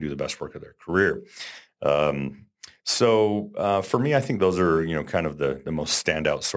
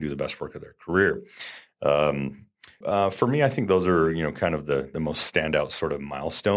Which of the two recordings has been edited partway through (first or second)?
second